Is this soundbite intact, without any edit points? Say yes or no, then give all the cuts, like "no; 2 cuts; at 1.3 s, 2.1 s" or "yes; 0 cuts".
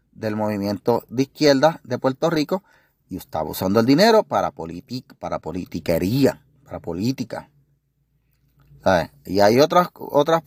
yes; 0 cuts